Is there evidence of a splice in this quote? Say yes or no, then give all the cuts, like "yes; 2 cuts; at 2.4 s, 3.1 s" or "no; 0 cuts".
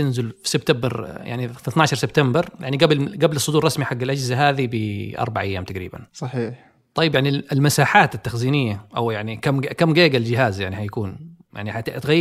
no; 0 cuts